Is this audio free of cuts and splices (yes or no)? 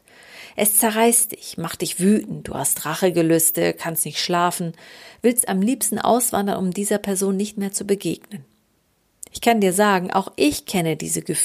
yes